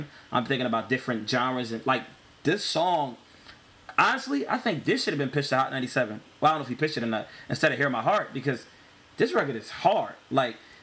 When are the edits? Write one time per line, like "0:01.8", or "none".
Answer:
none